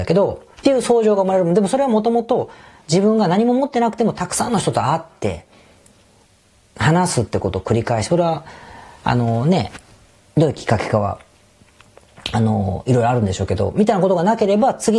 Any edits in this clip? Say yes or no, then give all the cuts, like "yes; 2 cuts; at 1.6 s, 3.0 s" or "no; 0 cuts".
no; 0 cuts